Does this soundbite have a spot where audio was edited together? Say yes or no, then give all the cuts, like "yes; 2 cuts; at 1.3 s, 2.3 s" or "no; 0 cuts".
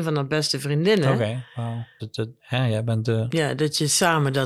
yes; 1 cut; at 2.0 s